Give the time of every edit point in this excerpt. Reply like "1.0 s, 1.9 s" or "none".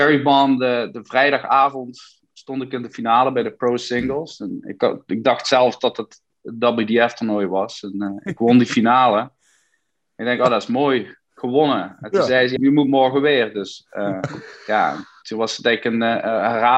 12.6 s